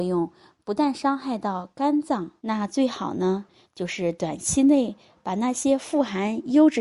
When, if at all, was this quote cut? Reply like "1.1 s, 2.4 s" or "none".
2.4 s